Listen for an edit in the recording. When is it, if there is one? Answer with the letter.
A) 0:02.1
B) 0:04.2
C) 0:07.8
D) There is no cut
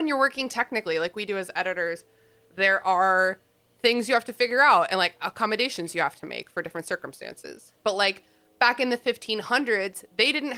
C